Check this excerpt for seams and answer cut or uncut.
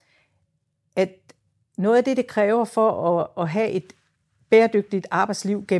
uncut